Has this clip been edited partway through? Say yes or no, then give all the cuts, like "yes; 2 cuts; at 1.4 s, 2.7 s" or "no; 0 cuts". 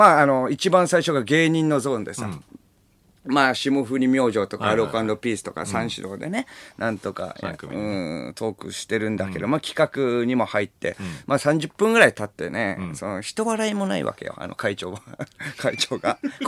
no; 0 cuts